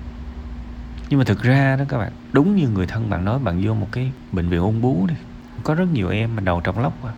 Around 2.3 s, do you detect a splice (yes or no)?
yes